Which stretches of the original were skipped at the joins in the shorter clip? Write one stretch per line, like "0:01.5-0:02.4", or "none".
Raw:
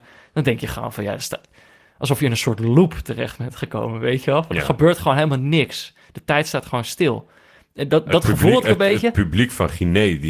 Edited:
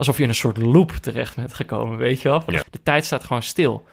0:04.6-0:06.0